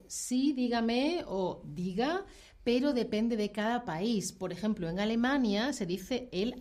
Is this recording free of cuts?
yes; 0 cuts

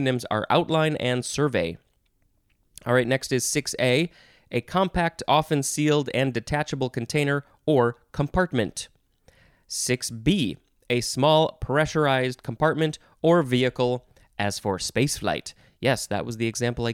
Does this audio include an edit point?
no; 0 cuts

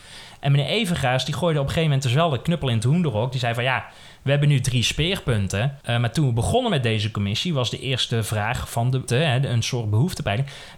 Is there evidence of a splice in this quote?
yes; 2 cuts; at 5.8 s, 9.1 s

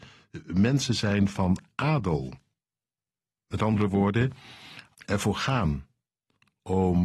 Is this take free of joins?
no; 1 cut; at 4.9 s

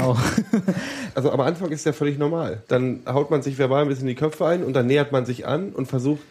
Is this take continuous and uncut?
no; 2 cuts; at 1.1 s, 2.7 s

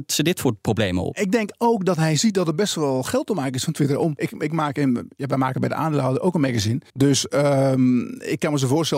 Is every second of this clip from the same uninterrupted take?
no; 2 cuts; at 4.2 s, 6.9 s

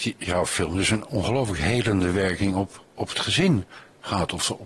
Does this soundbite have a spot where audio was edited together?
no; 0 cuts

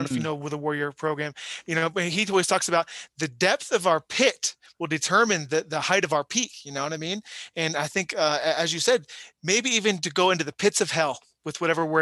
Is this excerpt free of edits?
no; 1 cut; at 9.3 s

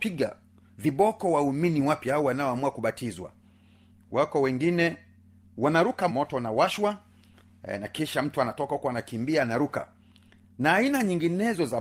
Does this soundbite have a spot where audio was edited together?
yes; 1 cut; at 6.1 s

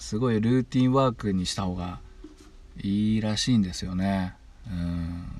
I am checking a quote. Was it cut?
no; 0 cuts

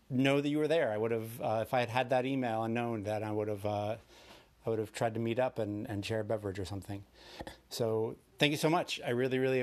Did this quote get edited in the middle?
yes; 1 cut; at 5.9 s

